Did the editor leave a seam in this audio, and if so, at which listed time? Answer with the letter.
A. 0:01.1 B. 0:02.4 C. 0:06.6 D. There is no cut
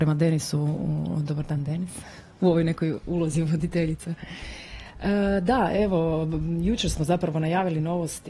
B